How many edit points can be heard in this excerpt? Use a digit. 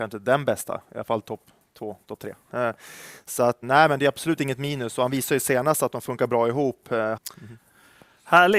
2